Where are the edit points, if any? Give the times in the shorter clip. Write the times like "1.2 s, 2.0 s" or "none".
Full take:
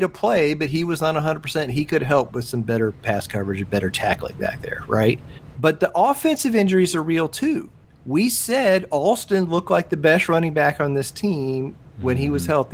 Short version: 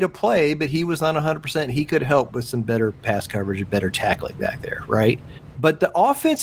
none